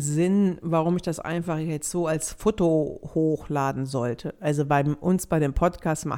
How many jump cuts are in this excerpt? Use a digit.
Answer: 0